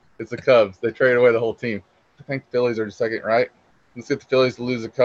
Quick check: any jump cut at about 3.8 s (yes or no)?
no